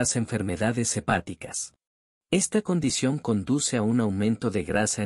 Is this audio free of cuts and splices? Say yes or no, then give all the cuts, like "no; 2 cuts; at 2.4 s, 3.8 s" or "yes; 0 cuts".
no; 1 cut; at 2.2 s